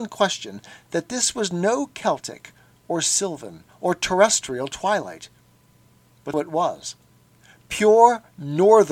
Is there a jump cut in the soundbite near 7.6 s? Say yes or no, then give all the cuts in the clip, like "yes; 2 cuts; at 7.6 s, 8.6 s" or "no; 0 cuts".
no; 1 cut; at 6.3 s